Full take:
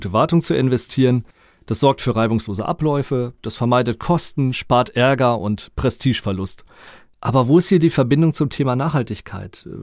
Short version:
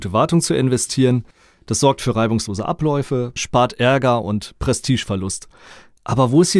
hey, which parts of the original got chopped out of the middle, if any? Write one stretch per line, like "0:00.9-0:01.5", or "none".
0:03.4-0:04.5